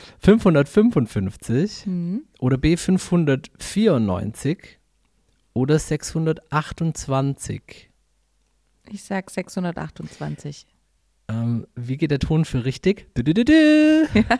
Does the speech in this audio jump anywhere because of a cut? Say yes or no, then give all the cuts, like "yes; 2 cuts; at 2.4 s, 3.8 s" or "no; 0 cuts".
no; 0 cuts